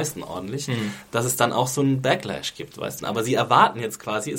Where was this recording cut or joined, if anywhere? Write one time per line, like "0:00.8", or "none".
0:03.0